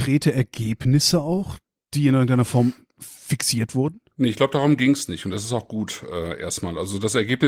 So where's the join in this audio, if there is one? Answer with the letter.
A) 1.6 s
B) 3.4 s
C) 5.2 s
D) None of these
D